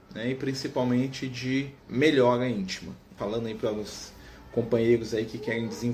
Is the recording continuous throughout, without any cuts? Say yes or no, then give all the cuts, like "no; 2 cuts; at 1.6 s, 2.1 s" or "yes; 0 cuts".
no; 2 cuts; at 1.8 s, 3.2 s